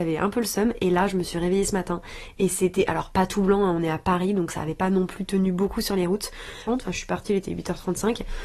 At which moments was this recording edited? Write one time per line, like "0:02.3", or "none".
0:06.7